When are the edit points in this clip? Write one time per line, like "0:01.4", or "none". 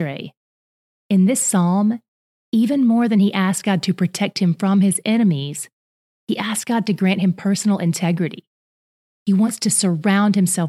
none

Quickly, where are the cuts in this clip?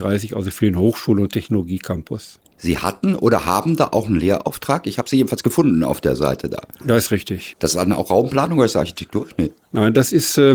0:07.5

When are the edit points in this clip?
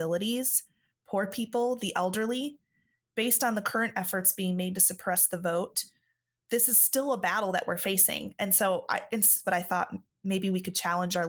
0:09.4

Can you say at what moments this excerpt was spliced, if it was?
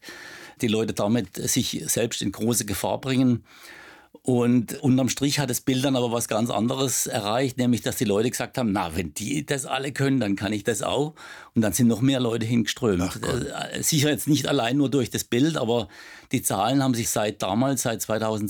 none

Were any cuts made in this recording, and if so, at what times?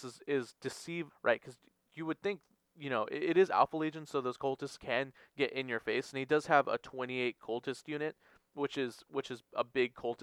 0:01.1

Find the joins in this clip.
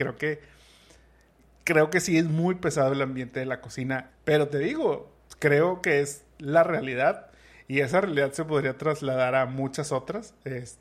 0:04.1

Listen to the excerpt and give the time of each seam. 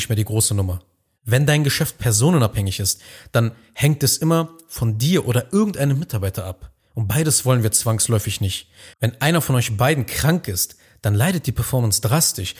0:01.1

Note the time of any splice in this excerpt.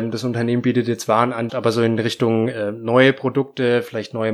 0:01.5

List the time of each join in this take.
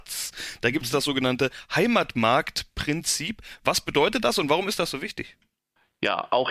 none

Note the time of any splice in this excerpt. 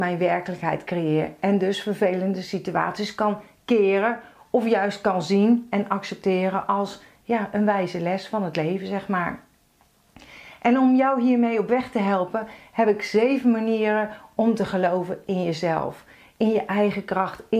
none

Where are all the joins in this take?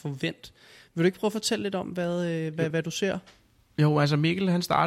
none

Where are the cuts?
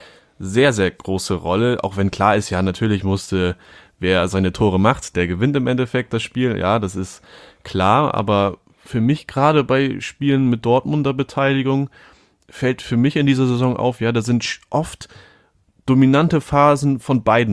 none

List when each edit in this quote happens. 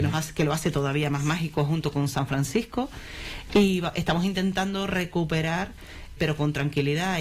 0:06.2

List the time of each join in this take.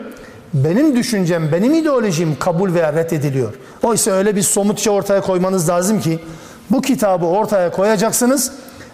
0:03.8

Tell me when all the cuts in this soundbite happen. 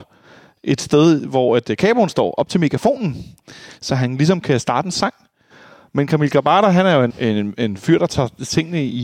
0:07.1

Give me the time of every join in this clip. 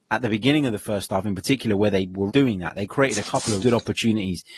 0:02.3
0:03.6

